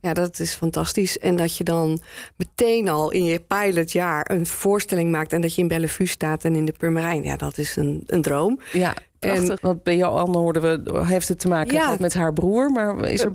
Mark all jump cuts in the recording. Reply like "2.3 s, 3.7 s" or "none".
9.6 s

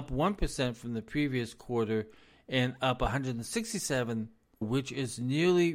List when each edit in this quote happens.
4.6 s

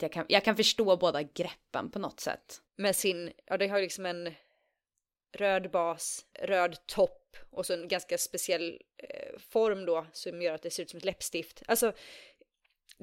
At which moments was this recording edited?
2.6 s, 6.3 s

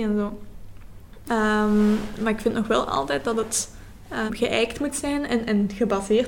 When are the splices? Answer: 1.3 s, 4.3 s

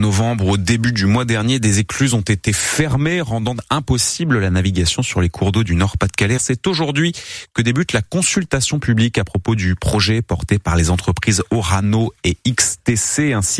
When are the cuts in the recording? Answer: 6.4 s

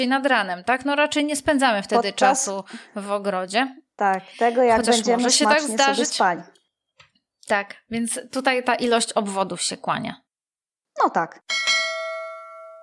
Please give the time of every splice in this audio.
none

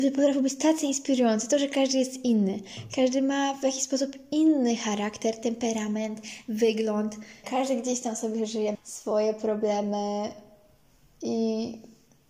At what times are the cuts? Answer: 7.4 s, 8.7 s

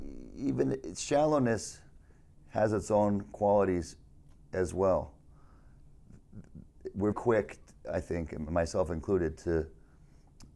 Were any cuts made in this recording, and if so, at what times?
7.1 s

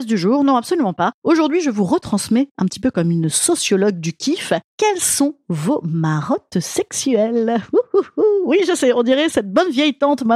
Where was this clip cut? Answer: none

